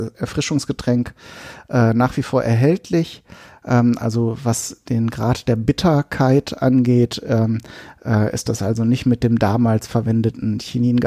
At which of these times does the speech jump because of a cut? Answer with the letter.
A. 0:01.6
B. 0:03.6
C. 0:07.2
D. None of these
B